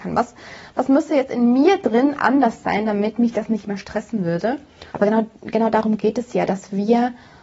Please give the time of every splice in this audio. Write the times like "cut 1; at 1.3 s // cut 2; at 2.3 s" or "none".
cut 1; at 4.9 s

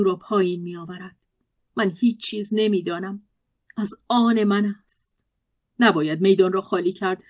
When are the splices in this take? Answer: cut 1; at 3.6 s // cut 2; at 5.6 s

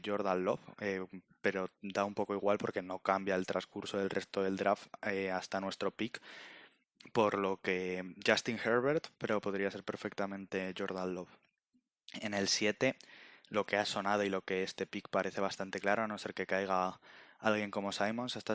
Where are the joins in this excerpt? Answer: none

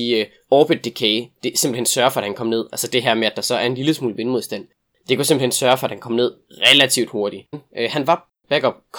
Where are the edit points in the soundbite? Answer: cut 1; at 7.5 s

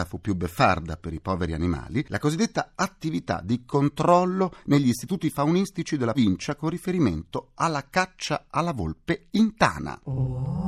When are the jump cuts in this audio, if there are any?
cut 1; at 6.1 s

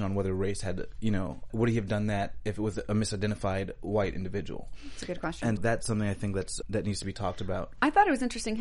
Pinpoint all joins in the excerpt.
cut 1; at 1.5 s // cut 2; at 5.6 s // cut 3; at 6.6 s

